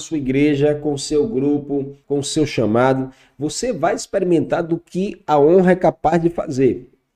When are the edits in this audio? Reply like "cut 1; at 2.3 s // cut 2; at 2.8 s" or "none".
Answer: cut 1; at 2.0 s